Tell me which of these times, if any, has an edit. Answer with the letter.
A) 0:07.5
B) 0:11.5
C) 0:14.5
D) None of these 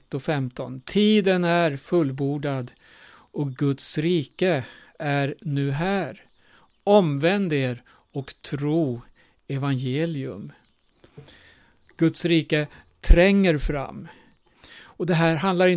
C